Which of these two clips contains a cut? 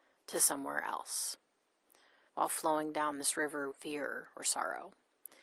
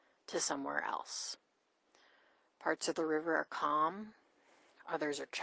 first; 2 cuts; at 2.3 s, 3.7 s

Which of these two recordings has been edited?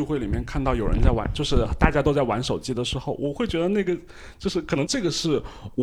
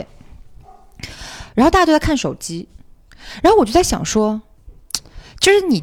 first; 1 cut; at 4.9 s

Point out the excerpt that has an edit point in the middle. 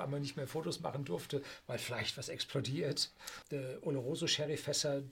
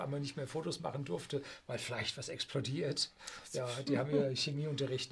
first; 1 cut; at 3.4 s

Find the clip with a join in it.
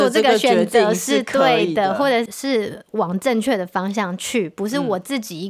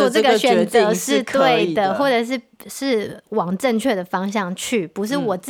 first; 1 cut; at 2.3 s

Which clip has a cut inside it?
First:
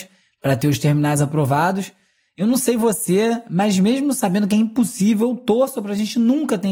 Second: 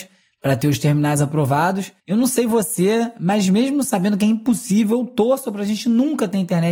second; 1 cut; at 2.0 s

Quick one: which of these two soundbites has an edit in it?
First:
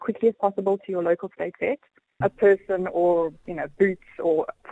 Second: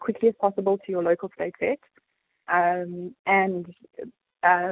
first; 1 cut; at 2.2 s

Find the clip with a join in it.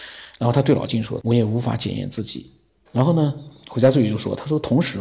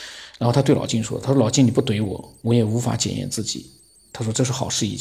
first; 2 cuts; at 1.2 s, 2.9 s

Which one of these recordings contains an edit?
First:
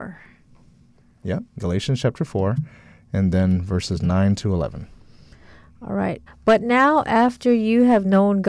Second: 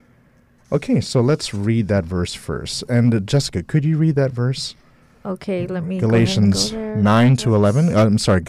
first; 1 cut; at 6.3 s

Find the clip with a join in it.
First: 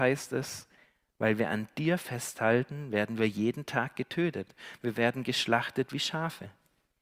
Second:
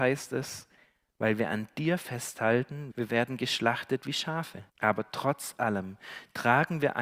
second; 2 cuts; at 2.9 s, 4.7 s

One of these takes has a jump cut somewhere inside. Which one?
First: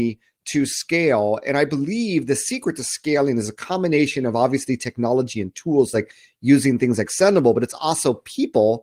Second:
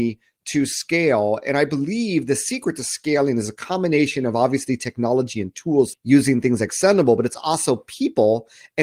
second; 1 cut; at 5.9 s

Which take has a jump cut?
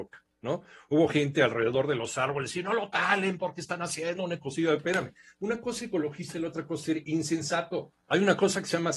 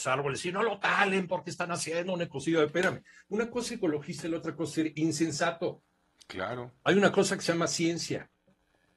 first; 1 cut; at 8.1 s

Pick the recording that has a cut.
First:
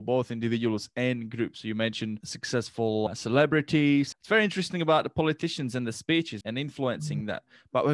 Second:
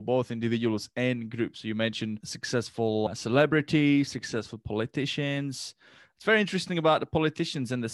first; 2 cuts; at 4.1 s, 6.4 s

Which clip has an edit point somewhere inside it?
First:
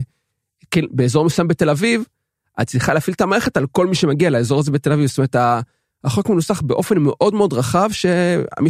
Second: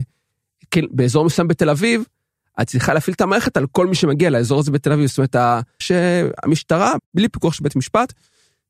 second; 2 cuts; at 5.8 s, 7.0 s

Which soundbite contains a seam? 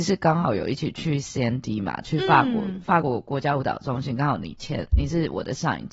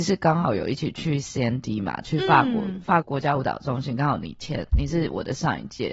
second; 1 cut; at 3.0 s

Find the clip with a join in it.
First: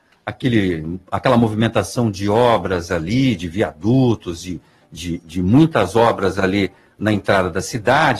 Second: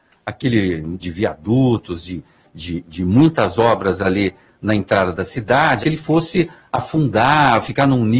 second; 2 cuts; at 1.0 s, 5.8 s

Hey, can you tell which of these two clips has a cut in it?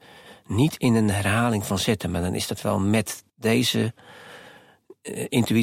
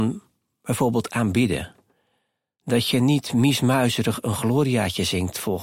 first; 1 cut; at 3.3 s

